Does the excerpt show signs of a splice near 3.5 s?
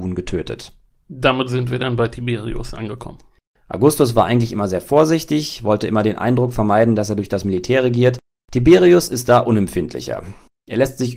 yes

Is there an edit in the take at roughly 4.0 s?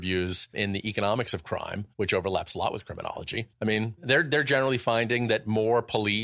yes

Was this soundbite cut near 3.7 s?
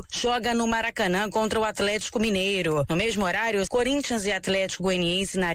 yes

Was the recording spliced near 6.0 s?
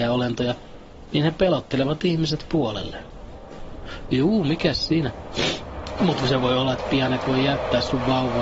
yes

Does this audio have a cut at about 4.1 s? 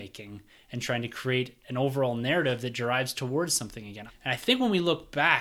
yes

